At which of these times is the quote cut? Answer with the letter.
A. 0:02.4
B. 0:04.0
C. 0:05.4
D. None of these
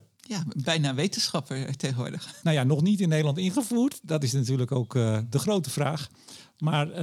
A